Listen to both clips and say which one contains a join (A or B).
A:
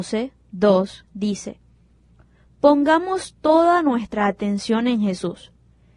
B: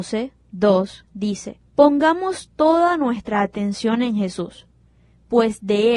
B